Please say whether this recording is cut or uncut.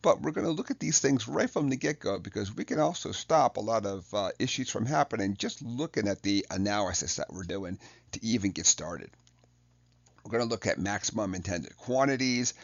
uncut